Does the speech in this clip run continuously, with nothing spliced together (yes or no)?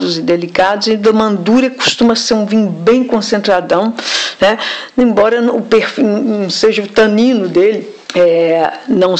no